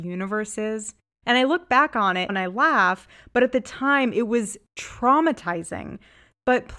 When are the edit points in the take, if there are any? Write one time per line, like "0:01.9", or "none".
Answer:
0:01.2
0:02.3